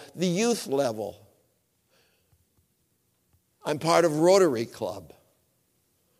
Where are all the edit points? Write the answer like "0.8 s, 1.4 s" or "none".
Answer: none

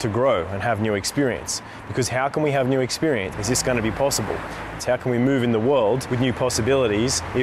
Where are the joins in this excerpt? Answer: 3.3 s, 4.8 s

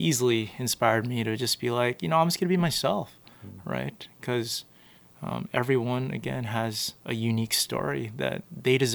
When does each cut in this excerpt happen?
7.0 s

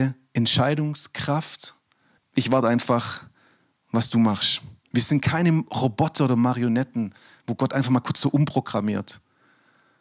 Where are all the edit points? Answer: 2.2 s

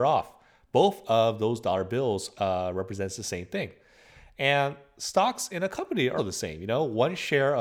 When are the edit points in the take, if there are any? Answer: 2.3 s, 6.2 s

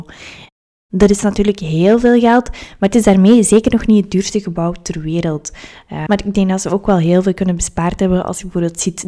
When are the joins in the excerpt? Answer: 6.1 s

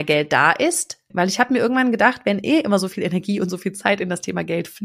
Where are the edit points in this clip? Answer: 1.1 s

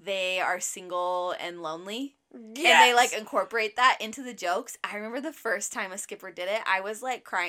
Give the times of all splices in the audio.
none

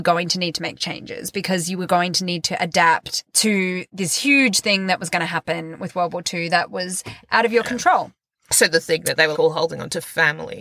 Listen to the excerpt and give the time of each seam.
9.3 s

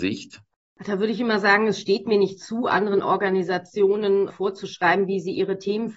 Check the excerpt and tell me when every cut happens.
4.3 s

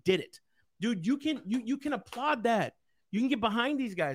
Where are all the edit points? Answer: none

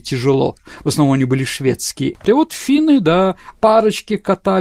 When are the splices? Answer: 2.1 s, 3.5 s

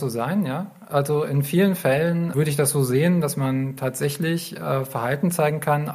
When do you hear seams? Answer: 2.3 s

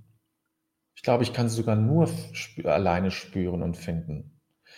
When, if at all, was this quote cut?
none

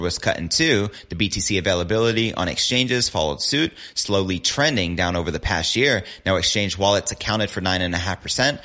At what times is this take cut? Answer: none

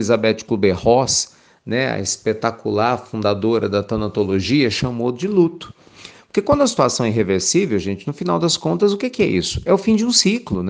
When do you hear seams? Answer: none

